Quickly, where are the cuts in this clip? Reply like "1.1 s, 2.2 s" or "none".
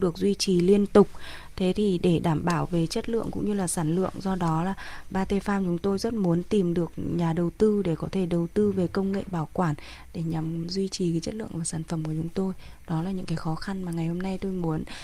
5.1 s